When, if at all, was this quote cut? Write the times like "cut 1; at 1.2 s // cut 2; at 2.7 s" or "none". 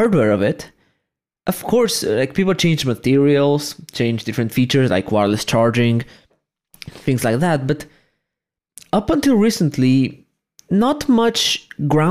none